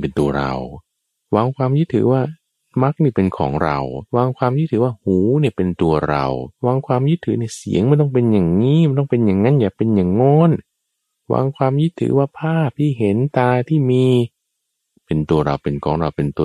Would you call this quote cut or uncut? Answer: cut